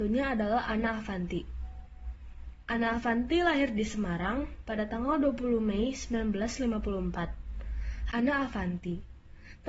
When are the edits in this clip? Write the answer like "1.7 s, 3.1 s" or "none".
8.1 s